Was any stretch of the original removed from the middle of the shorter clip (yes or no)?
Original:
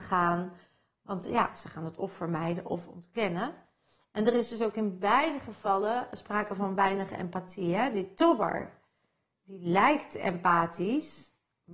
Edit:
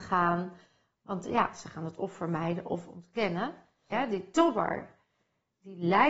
yes